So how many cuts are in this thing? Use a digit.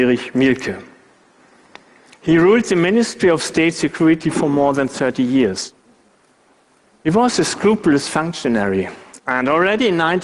1